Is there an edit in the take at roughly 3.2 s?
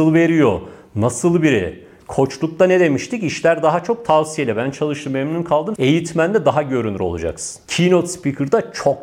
no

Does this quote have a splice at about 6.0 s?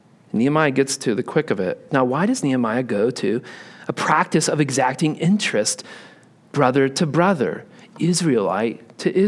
no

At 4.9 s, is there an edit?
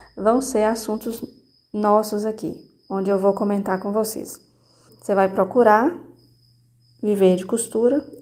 yes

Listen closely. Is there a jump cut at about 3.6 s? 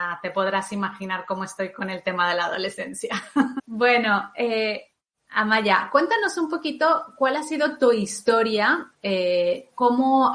yes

